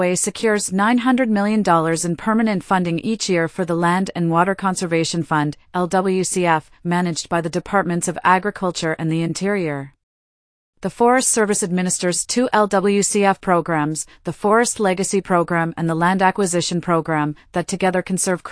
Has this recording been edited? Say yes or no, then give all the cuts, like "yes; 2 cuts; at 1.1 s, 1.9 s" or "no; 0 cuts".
no; 0 cuts